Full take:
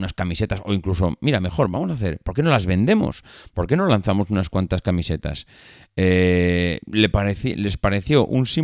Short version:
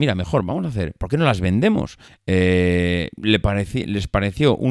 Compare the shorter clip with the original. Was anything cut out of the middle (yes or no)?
yes